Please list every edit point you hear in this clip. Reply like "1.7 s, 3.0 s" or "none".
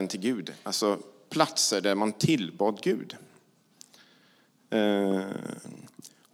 none